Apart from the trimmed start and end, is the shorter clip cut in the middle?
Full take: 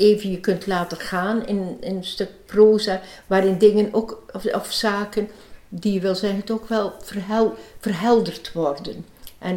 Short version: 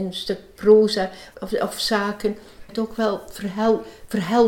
yes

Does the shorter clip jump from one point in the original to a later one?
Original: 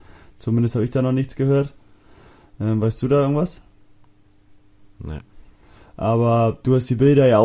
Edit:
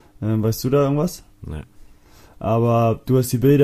yes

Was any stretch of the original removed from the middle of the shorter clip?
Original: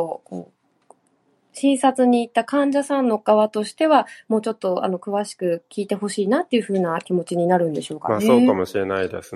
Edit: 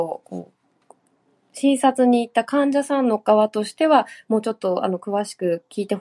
no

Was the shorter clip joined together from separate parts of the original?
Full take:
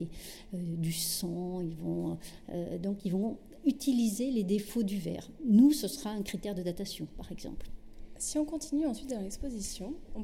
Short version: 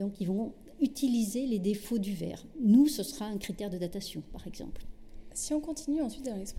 no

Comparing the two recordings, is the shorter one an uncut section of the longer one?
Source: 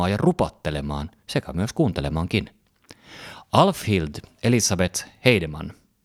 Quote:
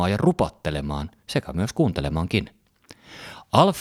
yes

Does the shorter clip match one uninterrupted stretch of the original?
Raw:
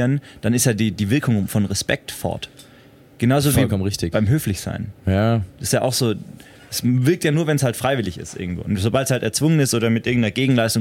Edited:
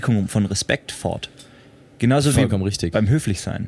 yes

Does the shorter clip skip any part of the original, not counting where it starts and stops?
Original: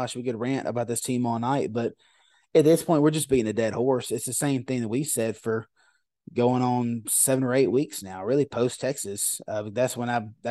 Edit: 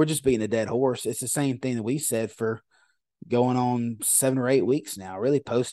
no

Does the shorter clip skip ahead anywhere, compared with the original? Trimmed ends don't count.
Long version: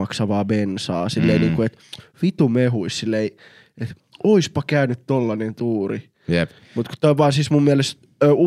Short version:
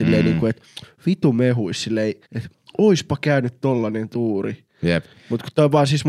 yes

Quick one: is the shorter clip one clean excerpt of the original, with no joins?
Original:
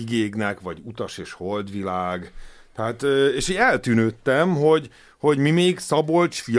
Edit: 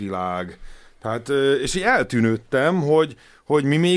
yes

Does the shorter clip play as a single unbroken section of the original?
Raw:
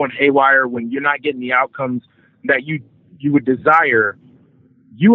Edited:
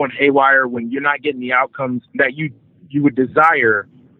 no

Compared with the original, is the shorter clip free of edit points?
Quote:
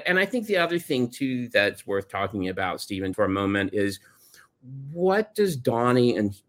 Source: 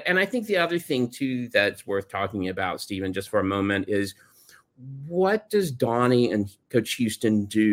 no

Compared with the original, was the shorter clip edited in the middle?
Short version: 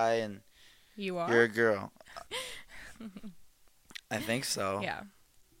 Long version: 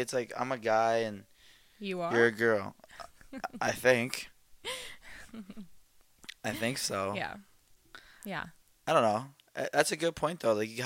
yes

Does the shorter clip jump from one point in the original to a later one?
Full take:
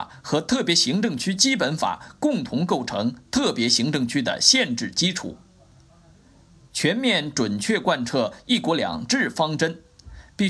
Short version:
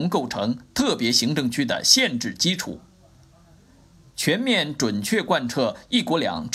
no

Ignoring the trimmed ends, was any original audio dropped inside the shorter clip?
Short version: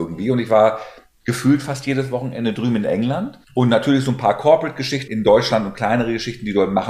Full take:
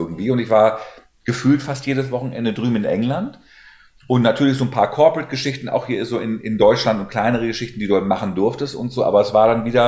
yes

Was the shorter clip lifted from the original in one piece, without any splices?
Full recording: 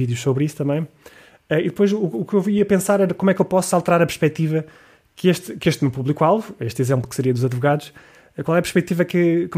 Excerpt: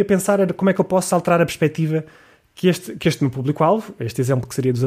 yes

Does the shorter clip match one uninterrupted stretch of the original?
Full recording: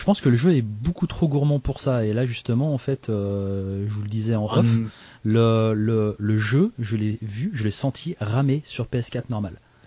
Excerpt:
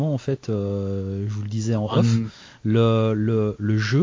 yes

